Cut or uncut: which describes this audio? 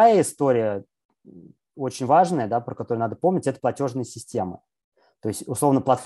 uncut